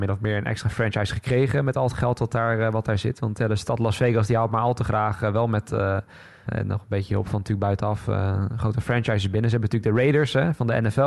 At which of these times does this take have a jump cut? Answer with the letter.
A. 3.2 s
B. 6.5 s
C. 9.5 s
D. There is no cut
B